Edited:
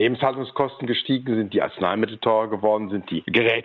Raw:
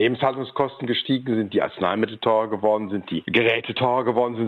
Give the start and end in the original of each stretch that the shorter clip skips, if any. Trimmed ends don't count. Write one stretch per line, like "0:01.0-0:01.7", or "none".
none